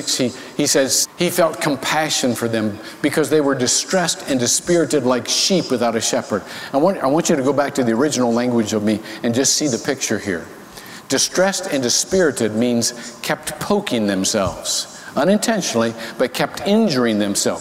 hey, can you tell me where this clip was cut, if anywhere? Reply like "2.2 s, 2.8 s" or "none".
1.0 s